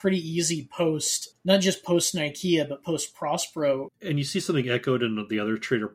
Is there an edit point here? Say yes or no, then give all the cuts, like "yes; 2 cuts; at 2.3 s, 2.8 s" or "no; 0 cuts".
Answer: yes; 2 cuts; at 1.3 s, 3.9 s